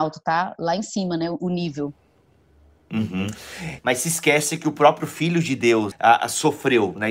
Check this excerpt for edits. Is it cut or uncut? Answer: cut